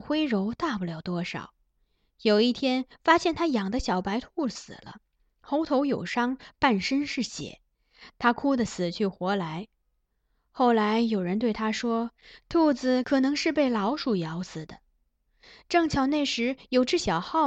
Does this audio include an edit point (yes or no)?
no